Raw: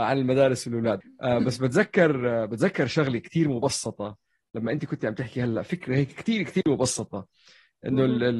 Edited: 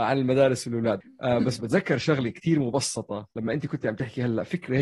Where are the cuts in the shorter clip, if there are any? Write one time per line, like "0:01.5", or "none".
0:01.6
0:03.3